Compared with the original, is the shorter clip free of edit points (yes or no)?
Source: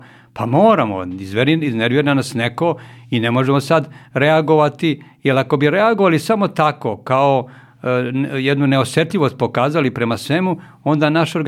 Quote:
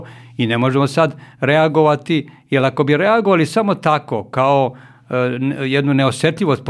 yes